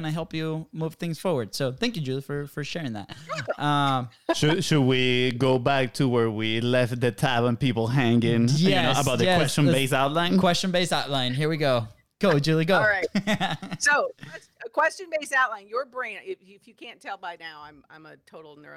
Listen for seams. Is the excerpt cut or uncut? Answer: uncut